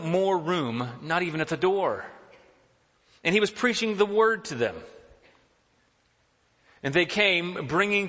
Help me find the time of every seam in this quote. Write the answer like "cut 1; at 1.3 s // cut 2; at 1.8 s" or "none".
none